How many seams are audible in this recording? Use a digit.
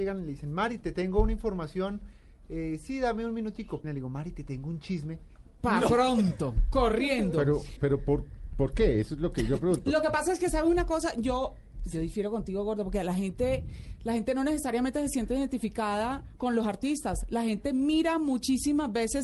2